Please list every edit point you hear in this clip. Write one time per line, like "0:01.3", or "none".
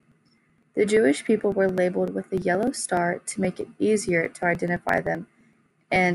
none